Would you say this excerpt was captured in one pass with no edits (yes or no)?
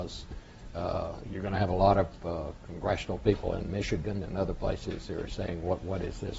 yes